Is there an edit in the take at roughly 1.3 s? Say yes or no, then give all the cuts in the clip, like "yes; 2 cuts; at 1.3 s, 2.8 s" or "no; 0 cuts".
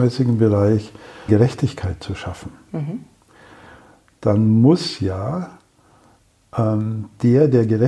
yes; 1 cut; at 1.3 s